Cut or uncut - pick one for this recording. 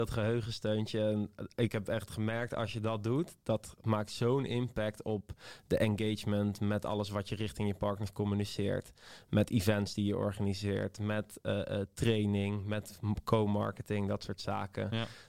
uncut